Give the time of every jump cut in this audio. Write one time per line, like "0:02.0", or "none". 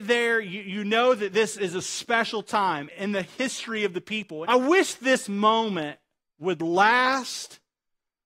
0:02.9
0:04.4